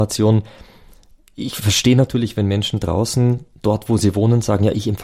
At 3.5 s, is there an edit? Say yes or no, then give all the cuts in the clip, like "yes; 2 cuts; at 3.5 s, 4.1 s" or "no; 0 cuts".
no; 0 cuts